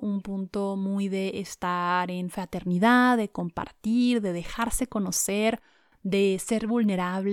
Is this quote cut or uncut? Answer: uncut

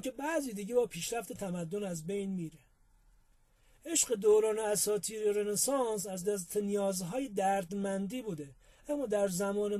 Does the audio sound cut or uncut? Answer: uncut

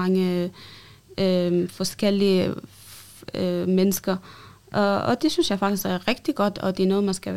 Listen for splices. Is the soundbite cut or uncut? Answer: uncut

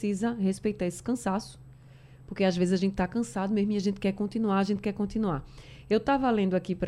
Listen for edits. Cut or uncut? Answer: uncut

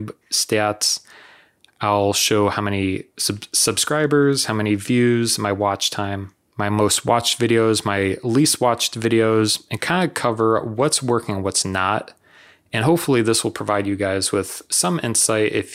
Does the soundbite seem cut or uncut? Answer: uncut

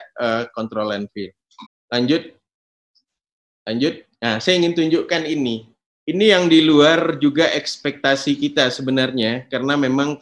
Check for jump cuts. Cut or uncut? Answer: cut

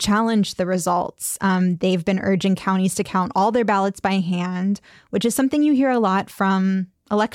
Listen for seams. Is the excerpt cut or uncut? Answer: uncut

